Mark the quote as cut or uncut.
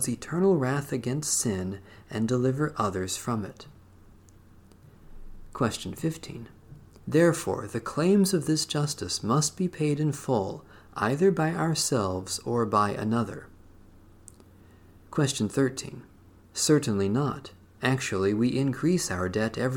cut